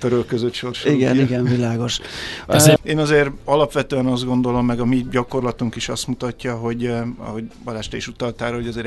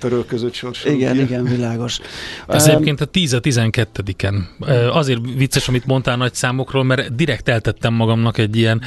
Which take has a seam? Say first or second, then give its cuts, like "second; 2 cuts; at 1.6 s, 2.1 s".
first; 1 cut; at 2.8 s